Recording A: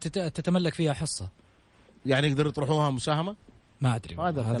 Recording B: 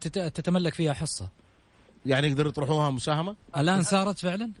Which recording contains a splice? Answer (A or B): B